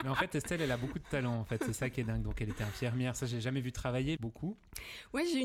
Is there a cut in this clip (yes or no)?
yes